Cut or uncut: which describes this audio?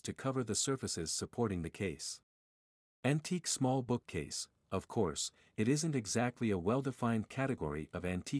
uncut